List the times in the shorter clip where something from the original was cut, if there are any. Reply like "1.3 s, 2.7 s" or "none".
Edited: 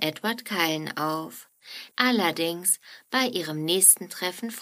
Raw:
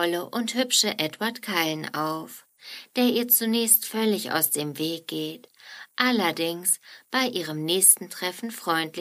1.9 s